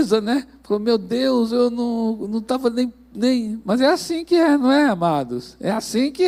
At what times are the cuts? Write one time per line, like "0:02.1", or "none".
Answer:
none

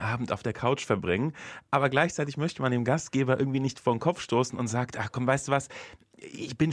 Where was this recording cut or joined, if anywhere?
none

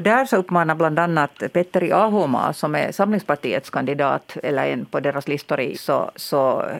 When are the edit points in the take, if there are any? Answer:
0:05.7

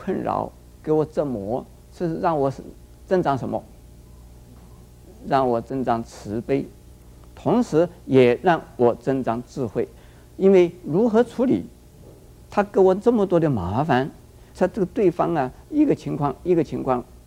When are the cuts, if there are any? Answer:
0:14.5
0:15.6

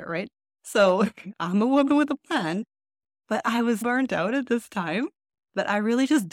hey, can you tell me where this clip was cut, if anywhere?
0:03.8

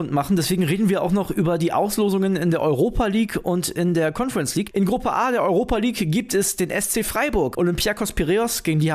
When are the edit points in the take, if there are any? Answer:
0:04.7
0:07.5

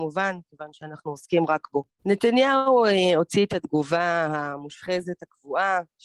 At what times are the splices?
0:02.0

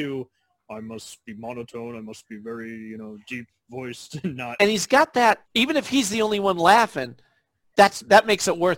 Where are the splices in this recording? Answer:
0:05.4

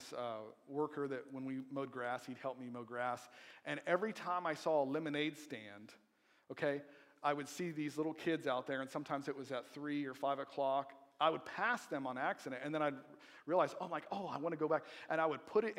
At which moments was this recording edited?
none

